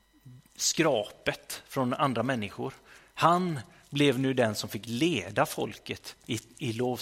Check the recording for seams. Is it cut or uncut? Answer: uncut